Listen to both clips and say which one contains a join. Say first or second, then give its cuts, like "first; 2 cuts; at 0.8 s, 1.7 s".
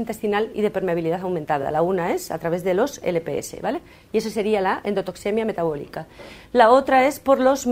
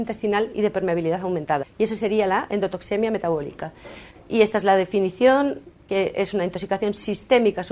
second; 2 cuts; at 1.6 s, 4.1 s